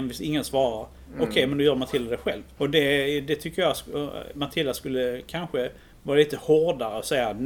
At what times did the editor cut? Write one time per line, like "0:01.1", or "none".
0:02.6